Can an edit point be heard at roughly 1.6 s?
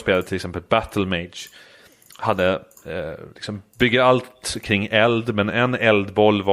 no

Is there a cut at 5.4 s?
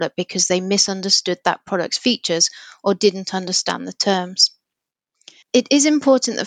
yes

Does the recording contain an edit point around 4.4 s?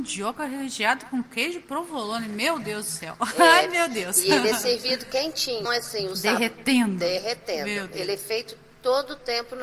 no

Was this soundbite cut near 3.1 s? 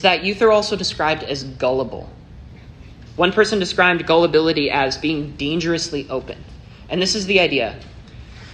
yes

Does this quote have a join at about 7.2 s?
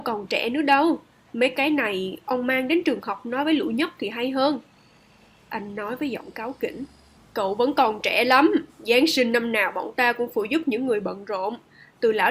yes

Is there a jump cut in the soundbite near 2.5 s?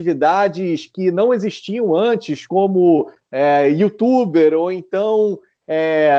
no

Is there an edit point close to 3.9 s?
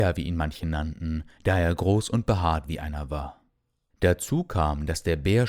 yes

